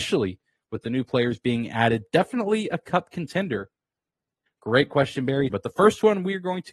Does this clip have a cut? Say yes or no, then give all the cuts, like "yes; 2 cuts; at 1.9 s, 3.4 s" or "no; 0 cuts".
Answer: yes; 2 cuts; at 4.5 s, 5.5 s